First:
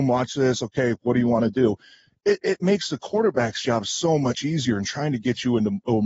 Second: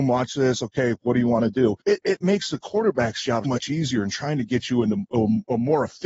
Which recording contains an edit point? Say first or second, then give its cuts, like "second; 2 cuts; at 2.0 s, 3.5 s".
second; 2 cuts; at 1.8 s, 3.4 s